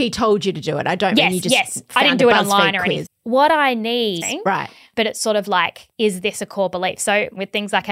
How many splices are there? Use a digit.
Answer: 2